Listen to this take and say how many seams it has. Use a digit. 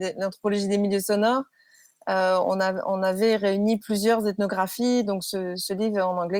0